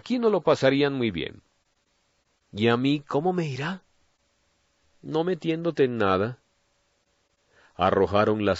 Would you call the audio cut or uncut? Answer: uncut